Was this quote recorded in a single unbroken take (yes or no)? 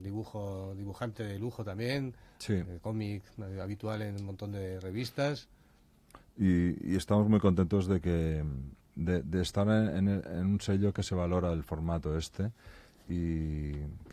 no